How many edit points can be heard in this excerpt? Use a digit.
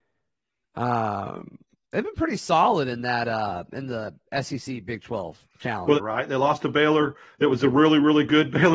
1